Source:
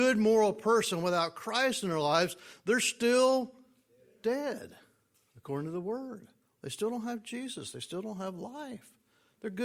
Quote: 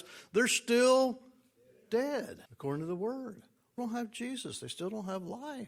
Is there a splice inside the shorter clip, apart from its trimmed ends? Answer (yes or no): yes